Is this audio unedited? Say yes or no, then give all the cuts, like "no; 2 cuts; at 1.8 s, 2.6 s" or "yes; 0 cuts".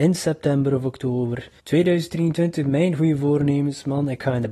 no; 1 cut; at 1.6 s